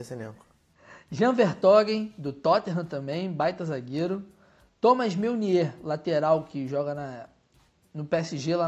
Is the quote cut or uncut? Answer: uncut